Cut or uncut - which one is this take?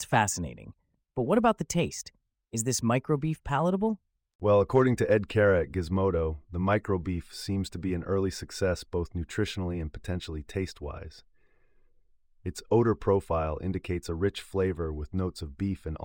uncut